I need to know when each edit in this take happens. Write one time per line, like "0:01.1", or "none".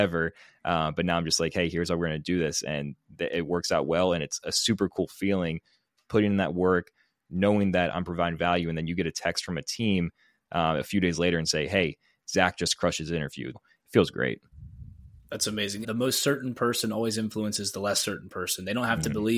0:13.5
0:15.8